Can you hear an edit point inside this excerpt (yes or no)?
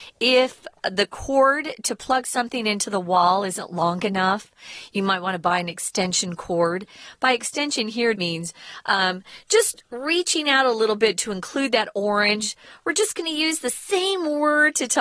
yes